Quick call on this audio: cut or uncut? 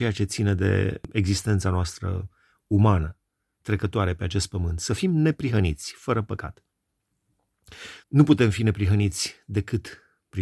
cut